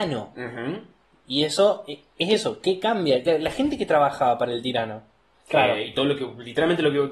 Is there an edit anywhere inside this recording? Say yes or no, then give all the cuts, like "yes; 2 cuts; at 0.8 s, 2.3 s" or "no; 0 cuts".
yes; 2 cuts; at 3.3 s, 5.3 s